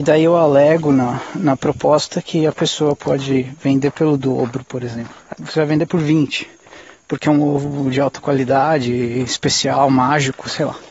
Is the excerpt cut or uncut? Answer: cut